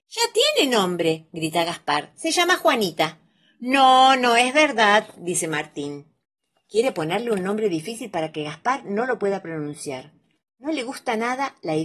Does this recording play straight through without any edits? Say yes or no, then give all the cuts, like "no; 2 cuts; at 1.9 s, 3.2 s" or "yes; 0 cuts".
no; 1 cut; at 10.4 s